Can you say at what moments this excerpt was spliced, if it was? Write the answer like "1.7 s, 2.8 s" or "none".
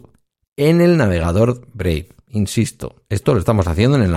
none

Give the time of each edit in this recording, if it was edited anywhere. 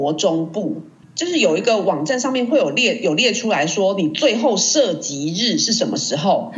1.0 s

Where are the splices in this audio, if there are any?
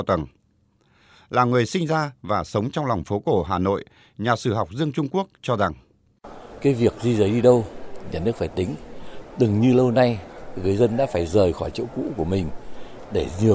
none

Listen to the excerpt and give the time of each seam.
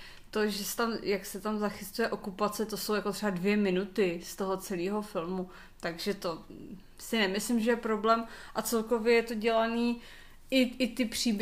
none

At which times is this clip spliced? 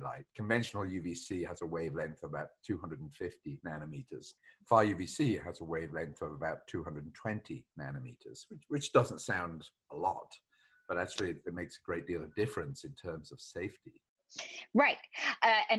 none

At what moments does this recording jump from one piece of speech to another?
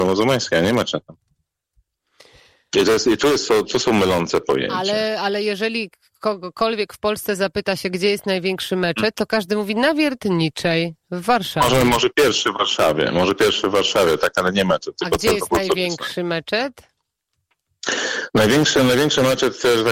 none

